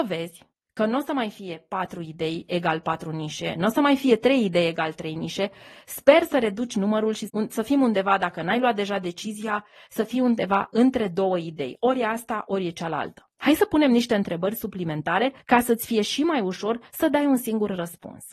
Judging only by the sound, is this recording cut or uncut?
uncut